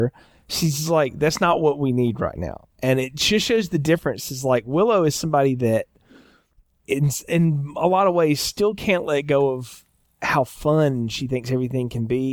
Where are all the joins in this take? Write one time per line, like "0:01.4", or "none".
none